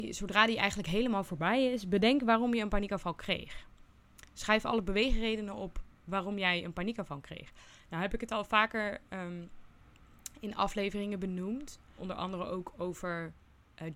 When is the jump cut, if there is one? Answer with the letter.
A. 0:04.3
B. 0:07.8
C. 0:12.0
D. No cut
C